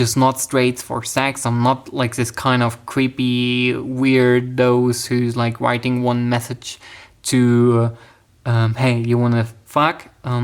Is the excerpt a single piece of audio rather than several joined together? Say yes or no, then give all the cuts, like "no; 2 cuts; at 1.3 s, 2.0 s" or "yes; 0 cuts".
yes; 0 cuts